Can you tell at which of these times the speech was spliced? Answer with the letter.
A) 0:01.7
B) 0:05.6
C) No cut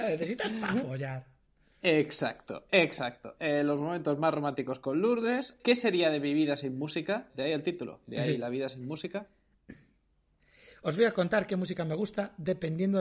B